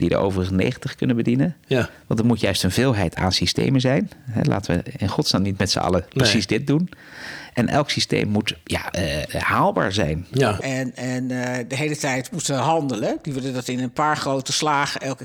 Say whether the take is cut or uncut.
cut